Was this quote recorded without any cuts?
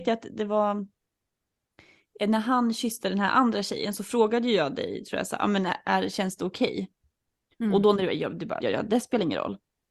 no; 1 cut; at 8.6 s

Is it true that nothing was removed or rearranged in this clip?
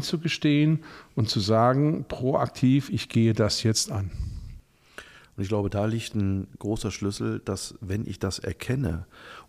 yes; 0 cuts

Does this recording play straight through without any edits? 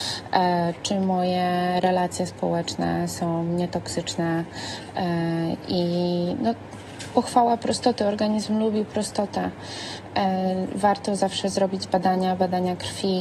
yes; 0 cuts

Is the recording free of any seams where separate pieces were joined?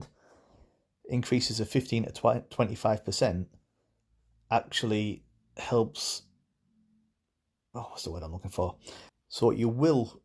no; 1 cut; at 9.1 s

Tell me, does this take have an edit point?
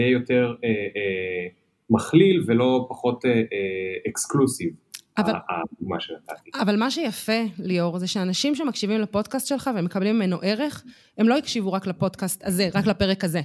no; 0 cuts

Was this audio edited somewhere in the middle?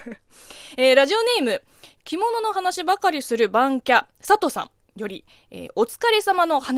no; 0 cuts

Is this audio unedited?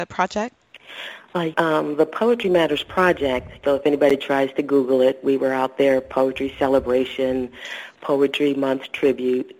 no; 2 cuts; at 1.5 s, 3.6 s

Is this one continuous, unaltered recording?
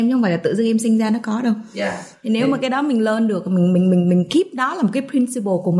yes; 0 cuts

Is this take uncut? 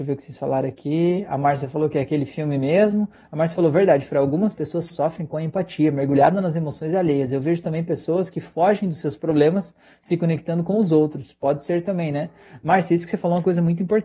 yes; 0 cuts

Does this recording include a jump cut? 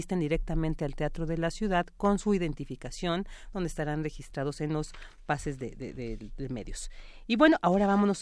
no; 0 cuts

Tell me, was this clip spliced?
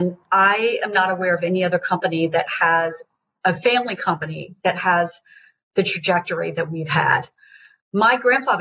no; 0 cuts

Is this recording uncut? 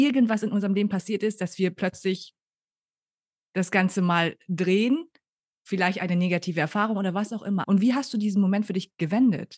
no; 1 cut; at 7.6 s

